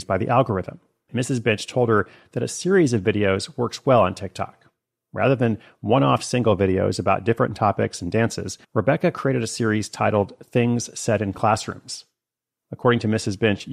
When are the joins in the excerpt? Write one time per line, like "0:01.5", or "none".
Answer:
0:01.1
0:08.6